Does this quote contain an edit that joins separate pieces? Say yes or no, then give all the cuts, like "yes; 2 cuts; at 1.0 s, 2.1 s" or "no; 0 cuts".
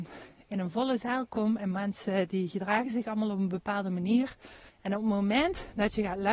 yes; 1 cut; at 4.7 s